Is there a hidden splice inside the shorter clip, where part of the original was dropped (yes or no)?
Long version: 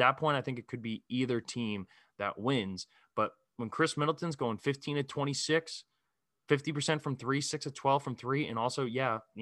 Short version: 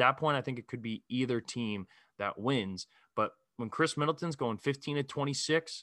no